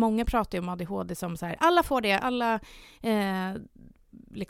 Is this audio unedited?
no; 1 cut; at 2.2 s

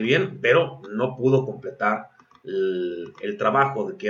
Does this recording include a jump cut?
no; 0 cuts

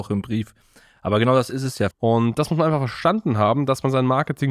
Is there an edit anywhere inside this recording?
yes; 1 cut; at 1.9 s

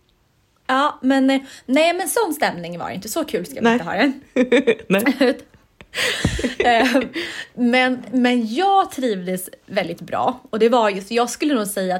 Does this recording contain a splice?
no; 0 cuts

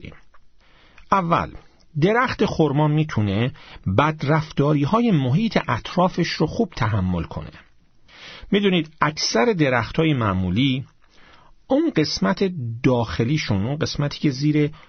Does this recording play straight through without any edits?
yes; 0 cuts

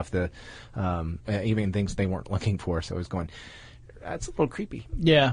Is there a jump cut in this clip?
yes; 1 cut; at 1.2 s

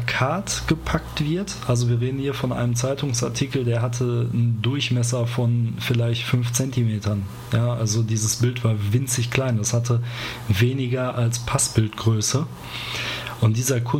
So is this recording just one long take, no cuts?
yes; 0 cuts

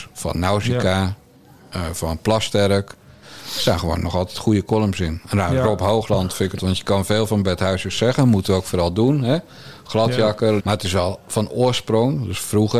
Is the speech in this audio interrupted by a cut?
yes; 2 cuts; at 6.6 s, 10.6 s

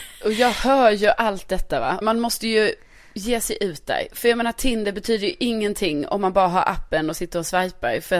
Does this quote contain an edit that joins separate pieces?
yes; 1 cut; at 2.0 s

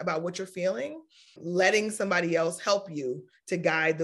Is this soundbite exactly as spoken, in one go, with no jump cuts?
no; 1 cut; at 1.4 s

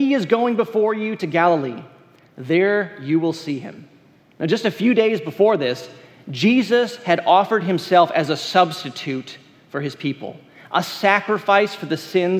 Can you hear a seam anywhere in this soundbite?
yes; 1 cut; at 4.3 s

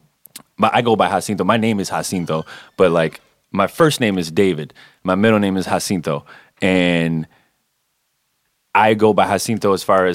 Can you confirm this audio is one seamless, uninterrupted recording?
yes; 0 cuts

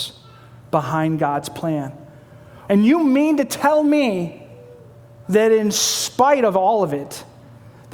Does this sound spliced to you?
yes; 2 cuts; at 2.7 s, 5.2 s

